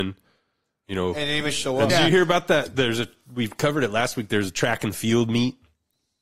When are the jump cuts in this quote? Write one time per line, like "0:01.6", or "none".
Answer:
0:01.9